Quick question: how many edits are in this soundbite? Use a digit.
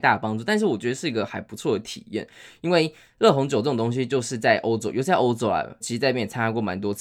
1